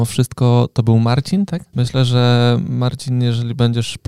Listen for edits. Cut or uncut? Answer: cut